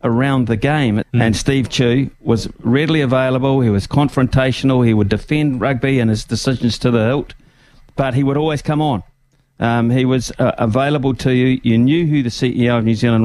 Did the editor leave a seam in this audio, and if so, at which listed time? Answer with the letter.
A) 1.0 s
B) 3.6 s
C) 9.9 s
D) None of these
A